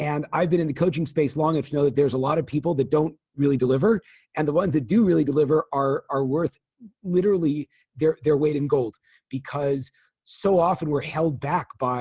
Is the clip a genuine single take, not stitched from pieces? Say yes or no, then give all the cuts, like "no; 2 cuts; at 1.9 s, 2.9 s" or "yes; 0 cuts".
yes; 0 cuts